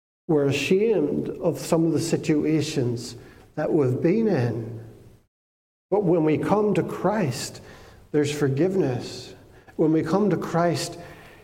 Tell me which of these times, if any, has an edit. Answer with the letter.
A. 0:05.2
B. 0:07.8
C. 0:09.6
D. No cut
D